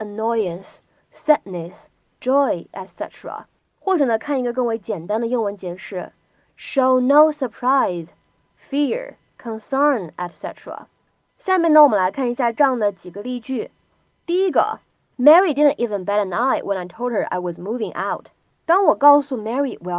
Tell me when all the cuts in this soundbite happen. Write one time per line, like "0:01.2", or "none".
none